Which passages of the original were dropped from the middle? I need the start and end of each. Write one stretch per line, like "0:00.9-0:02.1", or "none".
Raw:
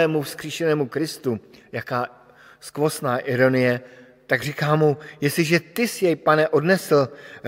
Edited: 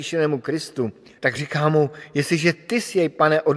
0:01.7-0:04.2